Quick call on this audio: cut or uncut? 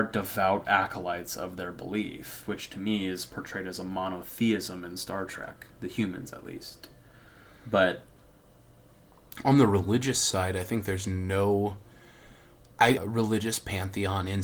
cut